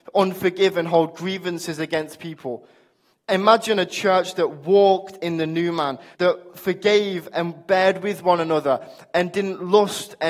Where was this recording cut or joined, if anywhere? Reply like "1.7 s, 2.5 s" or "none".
6.1 s